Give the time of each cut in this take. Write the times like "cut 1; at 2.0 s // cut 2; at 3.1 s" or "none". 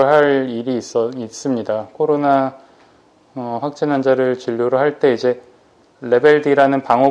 none